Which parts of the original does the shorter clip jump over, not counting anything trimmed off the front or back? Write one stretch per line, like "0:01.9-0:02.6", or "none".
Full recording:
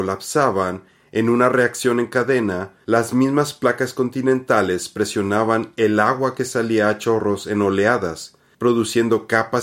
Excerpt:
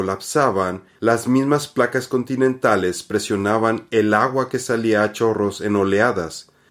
0:00.9-0:02.8